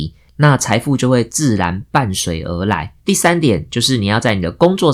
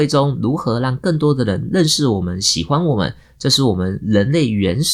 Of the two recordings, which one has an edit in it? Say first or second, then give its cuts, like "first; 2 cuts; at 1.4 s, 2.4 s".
first; 1 cut; at 3.0 s